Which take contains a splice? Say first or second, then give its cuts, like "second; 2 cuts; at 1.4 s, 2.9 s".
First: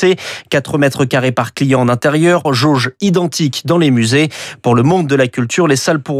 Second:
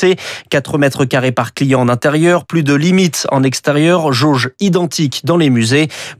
first; 1 cut; at 2.4 s